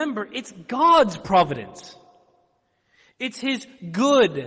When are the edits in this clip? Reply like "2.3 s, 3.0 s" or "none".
none

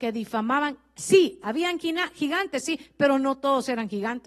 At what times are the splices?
none

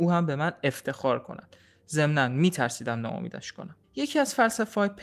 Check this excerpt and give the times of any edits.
3.8 s

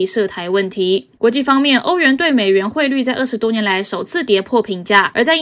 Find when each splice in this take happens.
1.2 s

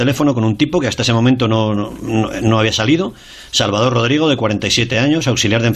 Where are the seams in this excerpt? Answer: none

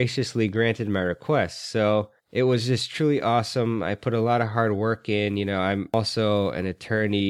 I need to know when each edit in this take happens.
2.2 s

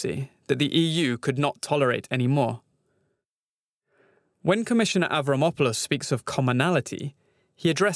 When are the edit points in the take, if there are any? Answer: none

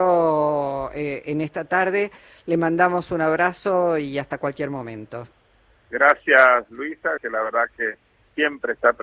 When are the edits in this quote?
7.2 s

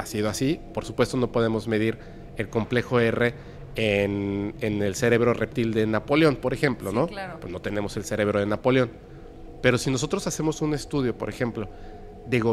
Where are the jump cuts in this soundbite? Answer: none

